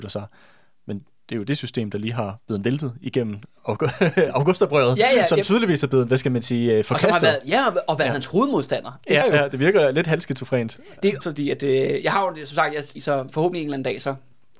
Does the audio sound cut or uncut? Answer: cut